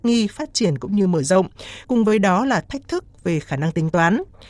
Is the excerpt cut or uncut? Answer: cut